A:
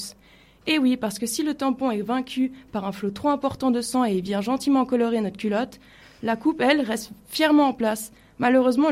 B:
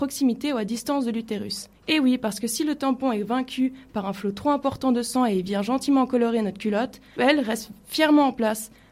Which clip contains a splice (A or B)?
B